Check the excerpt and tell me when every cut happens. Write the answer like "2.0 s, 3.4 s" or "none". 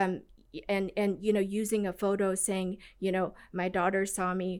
none